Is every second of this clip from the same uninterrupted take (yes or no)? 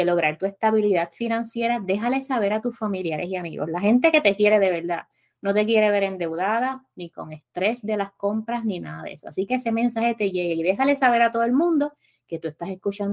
yes